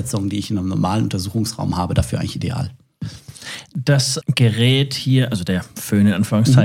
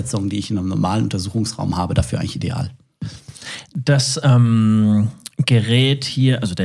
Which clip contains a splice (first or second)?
first